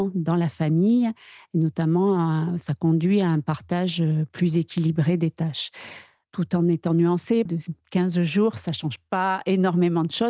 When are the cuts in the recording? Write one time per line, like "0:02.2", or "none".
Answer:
0:07.5

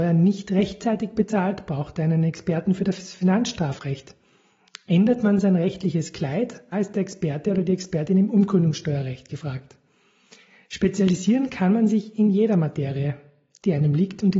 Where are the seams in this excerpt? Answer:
0:06.7

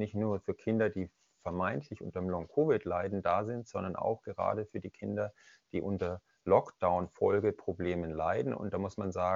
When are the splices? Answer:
none

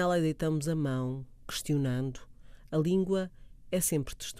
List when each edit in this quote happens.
none

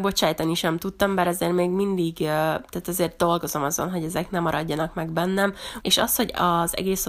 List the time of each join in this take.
0:05.8

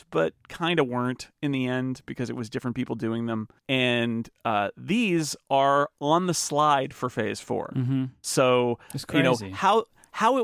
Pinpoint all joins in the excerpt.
0:03.6

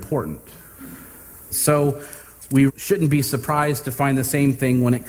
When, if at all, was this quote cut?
0:01.5
0:02.7

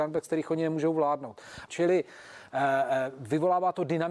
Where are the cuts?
0:01.7

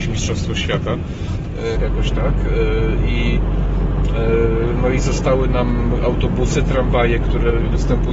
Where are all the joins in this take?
0:01.7

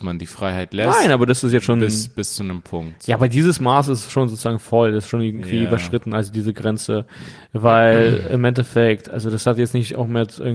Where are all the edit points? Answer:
none

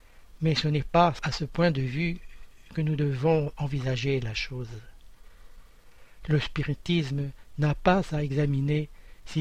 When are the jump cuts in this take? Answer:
none

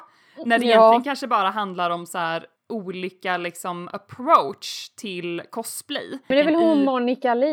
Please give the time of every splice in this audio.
0:02.6
0:06.3

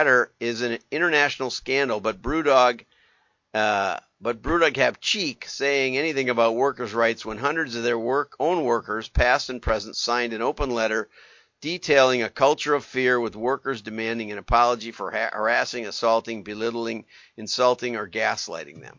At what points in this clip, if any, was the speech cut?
none

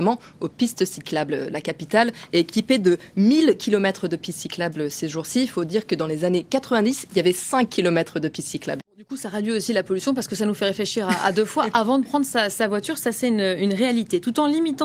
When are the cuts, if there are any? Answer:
0:08.8

